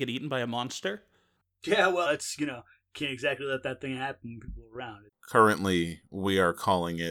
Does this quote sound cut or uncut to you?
cut